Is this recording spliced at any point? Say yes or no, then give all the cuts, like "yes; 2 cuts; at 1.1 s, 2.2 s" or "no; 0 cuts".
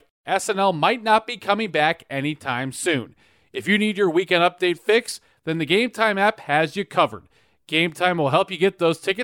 no; 0 cuts